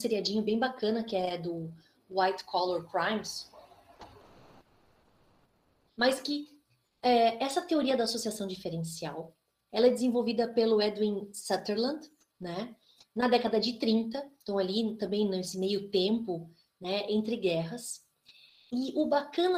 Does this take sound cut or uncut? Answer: cut